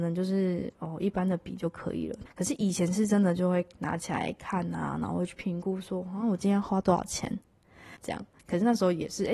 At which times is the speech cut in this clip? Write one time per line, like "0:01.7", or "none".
0:02.3
0:08.0